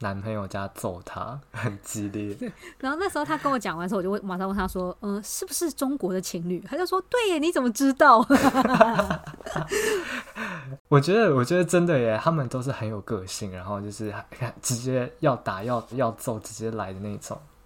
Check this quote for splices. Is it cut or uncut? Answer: cut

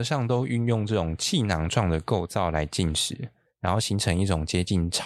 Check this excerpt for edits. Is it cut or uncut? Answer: cut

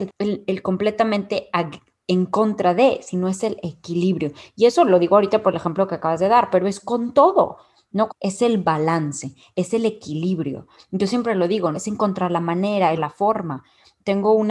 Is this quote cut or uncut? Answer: cut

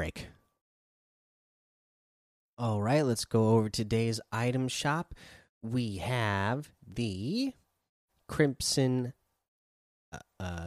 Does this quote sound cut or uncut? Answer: uncut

